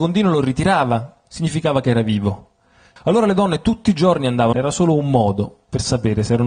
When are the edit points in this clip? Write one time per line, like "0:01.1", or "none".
0:03.0
0:04.5

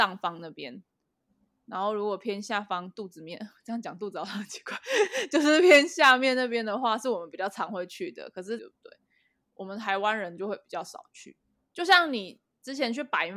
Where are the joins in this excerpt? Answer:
0:08.6

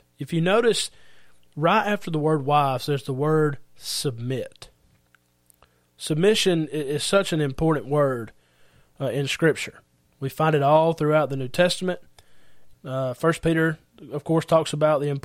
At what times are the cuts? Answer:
0:12.7

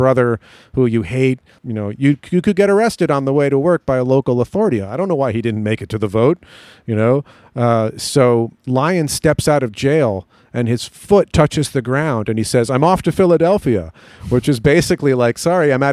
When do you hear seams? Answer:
0:01.6
0:08.6

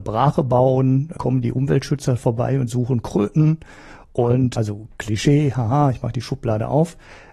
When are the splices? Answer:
0:04.5

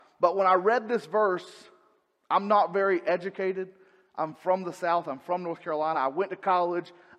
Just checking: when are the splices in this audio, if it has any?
none

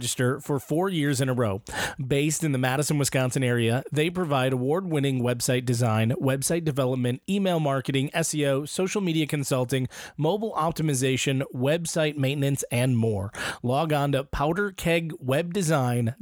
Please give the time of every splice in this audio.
none

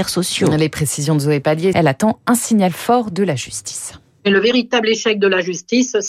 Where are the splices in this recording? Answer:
0:01.7

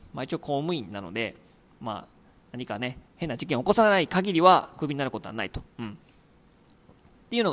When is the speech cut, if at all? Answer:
0:03.1

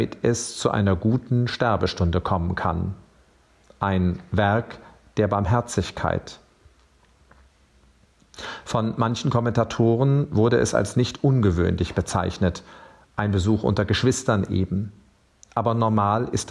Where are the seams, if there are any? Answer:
none

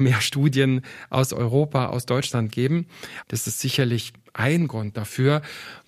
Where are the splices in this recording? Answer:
0:03.2

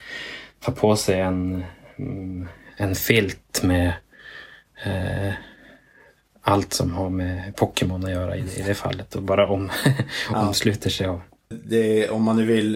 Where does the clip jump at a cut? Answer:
0:11.5

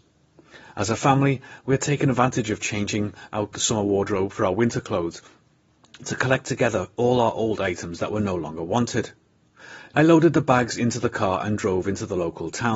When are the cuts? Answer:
0:09.9

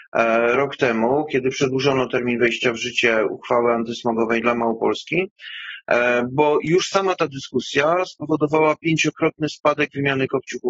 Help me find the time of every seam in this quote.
0:04.4

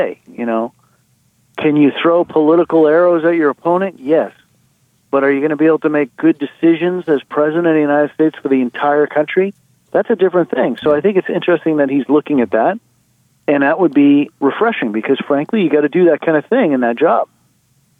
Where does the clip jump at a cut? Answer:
none

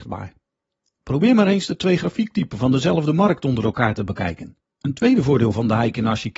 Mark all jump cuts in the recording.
0:04.6

